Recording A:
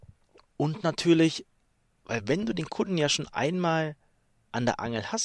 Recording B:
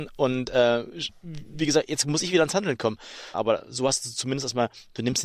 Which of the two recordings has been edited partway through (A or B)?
B